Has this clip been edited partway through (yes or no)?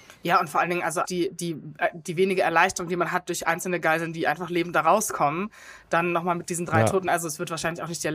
yes